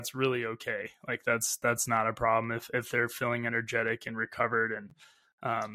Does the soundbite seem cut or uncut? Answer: uncut